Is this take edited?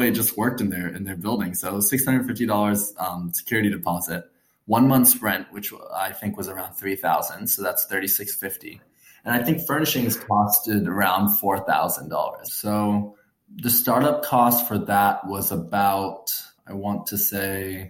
yes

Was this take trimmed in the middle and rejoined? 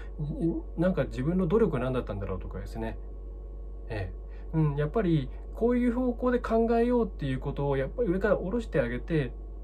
yes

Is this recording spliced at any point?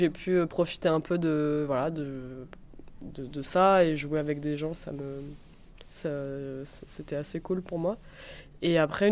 yes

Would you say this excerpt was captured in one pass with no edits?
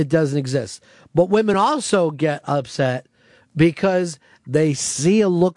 yes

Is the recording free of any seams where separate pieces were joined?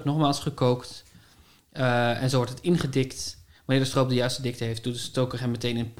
yes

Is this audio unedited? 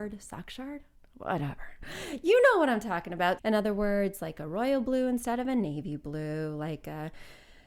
no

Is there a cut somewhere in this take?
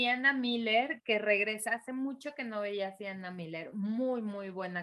no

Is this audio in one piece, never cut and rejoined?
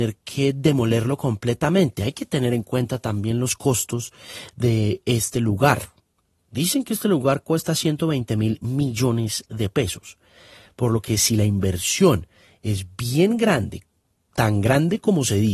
yes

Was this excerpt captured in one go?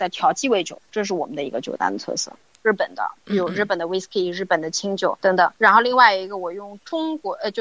no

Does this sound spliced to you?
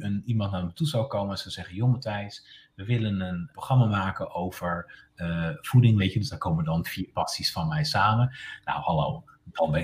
yes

